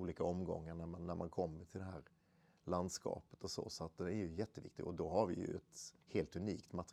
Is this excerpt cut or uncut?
cut